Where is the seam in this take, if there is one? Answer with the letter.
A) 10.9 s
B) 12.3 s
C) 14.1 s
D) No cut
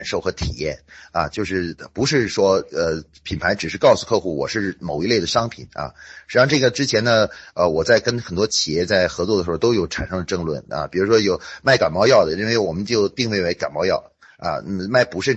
D